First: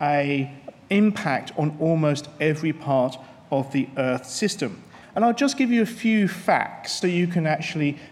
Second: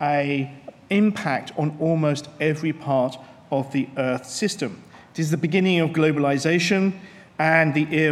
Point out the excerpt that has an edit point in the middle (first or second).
first